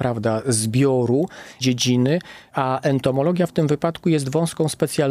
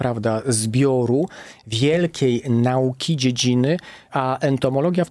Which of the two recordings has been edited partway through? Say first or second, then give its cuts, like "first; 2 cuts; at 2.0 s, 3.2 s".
first; 1 cut; at 1.6 s